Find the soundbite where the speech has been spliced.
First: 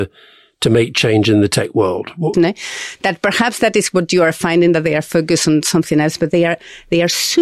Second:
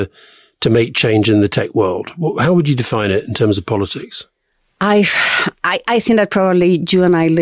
first; 1 cut; at 2.3 s

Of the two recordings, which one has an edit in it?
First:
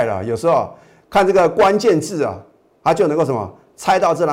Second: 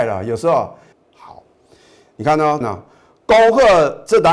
second; 2 cuts; at 0.9 s, 2.6 s

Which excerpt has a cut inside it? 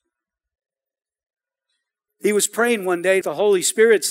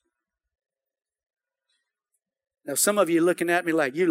first; 2 cuts; at 2.1 s, 3.2 s

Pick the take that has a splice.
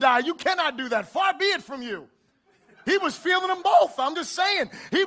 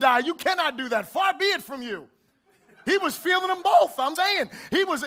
second; 1 cut; at 4.2 s

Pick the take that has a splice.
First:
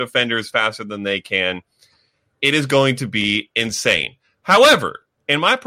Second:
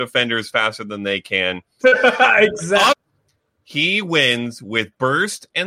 second; 2 cuts; at 1.8 s, 2.9 s

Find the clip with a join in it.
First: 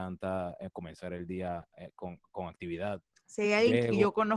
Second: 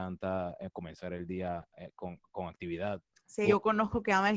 second; 1 cut; at 3.4 s

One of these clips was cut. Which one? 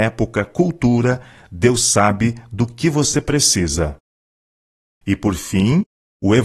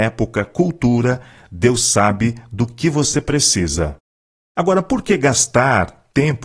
second; 1 cut; at 4.4 s

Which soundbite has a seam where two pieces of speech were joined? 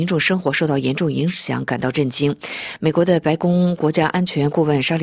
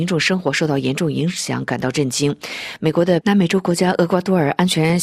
second; 1 cut; at 3.2 s

